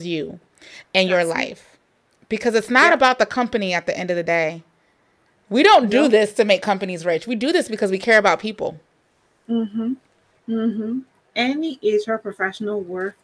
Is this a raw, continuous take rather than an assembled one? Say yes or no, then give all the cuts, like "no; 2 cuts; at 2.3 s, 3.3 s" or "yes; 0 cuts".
yes; 0 cuts